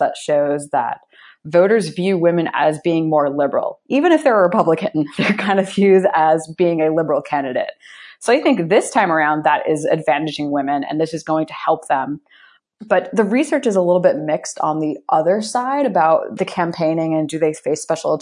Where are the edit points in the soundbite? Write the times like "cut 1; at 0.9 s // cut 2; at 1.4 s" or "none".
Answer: cut 1; at 16.4 s